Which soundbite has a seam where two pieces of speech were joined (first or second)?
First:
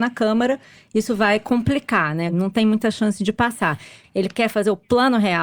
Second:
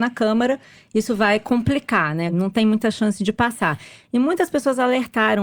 first